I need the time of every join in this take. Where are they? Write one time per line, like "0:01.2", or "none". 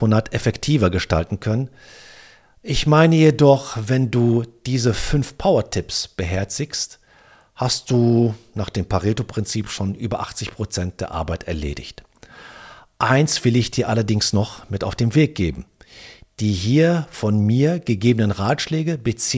none